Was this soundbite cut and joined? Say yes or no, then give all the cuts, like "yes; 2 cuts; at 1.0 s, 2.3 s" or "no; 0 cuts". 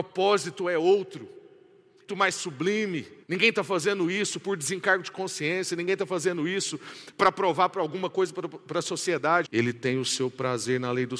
yes; 3 cuts; at 2.1 s, 3.2 s, 9.5 s